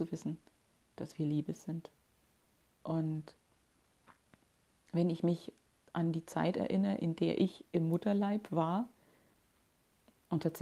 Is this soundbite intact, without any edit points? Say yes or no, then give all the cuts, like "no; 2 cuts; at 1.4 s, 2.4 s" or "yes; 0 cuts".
yes; 0 cuts